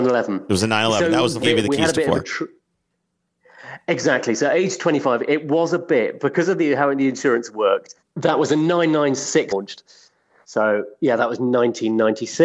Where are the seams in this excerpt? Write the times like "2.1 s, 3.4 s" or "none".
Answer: 1.4 s, 8.0 s, 9.5 s